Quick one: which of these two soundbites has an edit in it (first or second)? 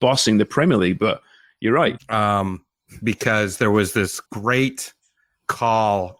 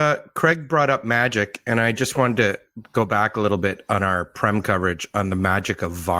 first